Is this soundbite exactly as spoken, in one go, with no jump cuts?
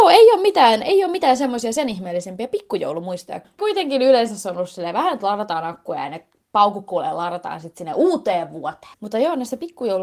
no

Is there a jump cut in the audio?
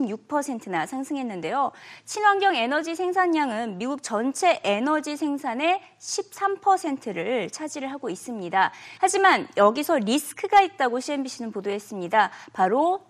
yes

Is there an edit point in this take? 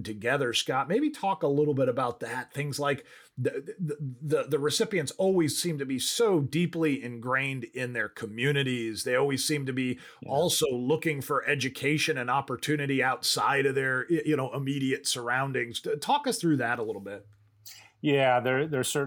no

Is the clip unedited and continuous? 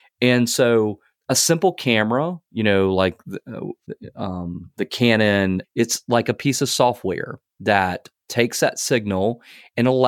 no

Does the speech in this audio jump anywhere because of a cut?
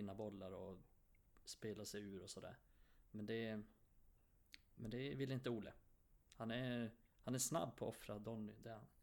no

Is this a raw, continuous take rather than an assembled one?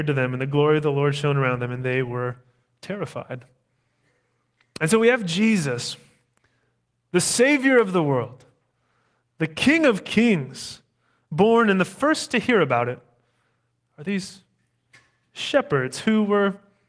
yes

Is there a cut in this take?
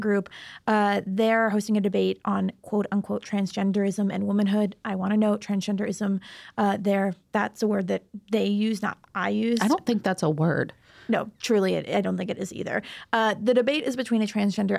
no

